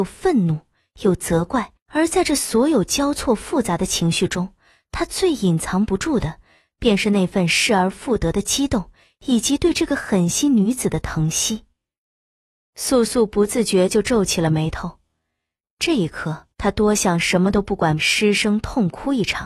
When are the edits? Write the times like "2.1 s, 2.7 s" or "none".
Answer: 1.8 s, 16.5 s, 18.0 s